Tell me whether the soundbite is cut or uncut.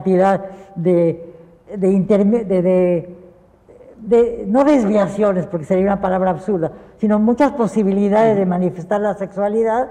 uncut